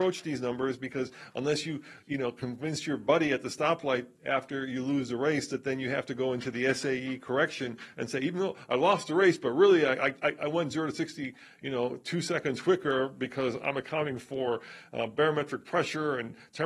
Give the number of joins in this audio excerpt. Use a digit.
0